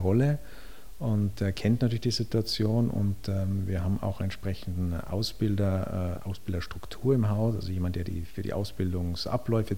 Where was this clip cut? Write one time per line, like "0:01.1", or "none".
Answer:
0:06.2